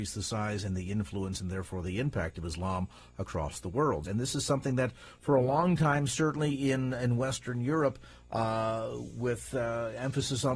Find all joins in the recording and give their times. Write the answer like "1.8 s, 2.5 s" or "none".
4.0 s